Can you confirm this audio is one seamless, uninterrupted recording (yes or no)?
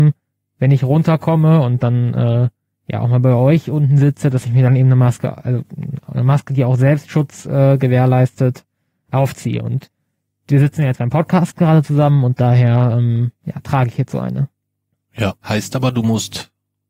no